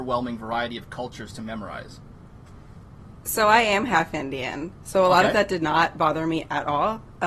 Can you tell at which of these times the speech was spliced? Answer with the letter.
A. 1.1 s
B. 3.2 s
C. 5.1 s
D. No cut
D